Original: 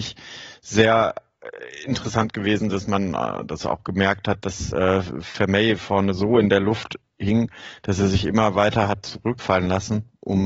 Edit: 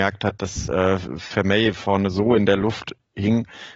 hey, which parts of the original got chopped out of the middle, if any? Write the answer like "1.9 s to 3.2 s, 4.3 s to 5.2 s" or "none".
none